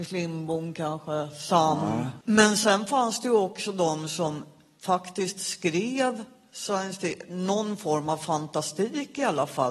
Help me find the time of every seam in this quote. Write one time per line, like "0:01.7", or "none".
0:02.2

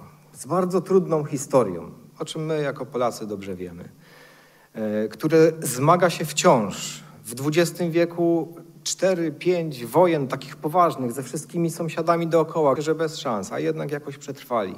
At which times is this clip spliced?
0:12.8

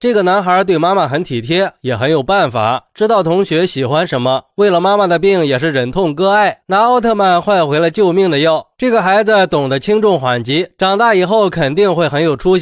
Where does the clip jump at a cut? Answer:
none

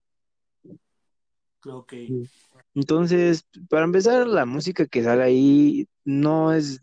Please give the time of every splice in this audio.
0:02.6

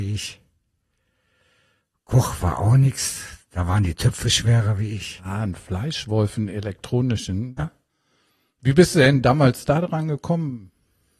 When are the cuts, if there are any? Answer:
0:05.2
0:07.6

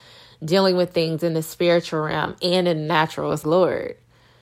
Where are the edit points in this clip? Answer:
0:03.4

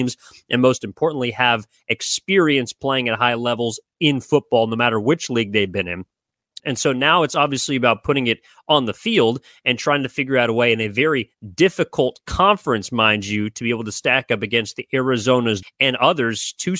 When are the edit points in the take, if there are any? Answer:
0:06.6
0:15.6

